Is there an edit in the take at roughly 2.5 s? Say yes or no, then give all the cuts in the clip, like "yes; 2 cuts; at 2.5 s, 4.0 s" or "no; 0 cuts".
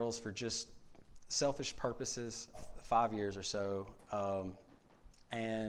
yes; 1 cut; at 2.5 s